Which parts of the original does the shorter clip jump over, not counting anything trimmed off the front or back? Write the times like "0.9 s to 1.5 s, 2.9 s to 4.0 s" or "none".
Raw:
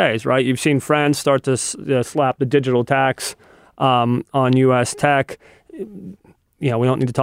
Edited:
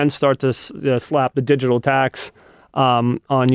none